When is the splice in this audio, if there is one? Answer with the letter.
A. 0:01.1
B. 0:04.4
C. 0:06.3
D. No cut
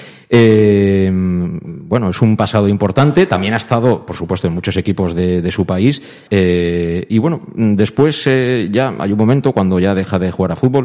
C